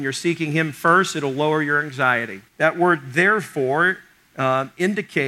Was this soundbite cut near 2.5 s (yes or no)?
yes